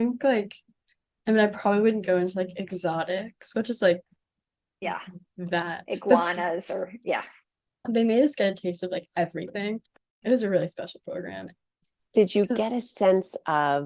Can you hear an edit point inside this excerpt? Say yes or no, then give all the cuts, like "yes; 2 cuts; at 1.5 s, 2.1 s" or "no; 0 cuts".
no; 0 cuts